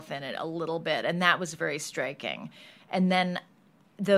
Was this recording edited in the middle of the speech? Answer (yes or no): no